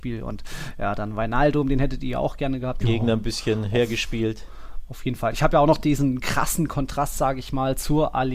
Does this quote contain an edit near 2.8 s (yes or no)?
yes